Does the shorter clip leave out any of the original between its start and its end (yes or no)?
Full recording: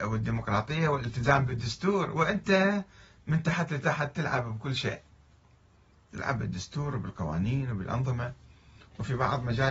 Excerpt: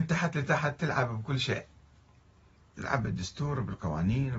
no